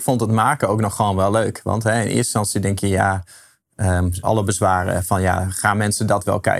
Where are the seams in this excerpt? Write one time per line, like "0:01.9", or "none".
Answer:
0:04.2